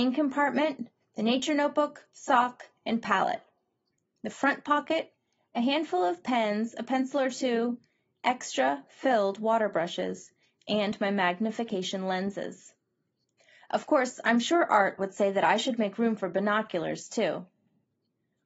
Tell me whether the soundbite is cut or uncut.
uncut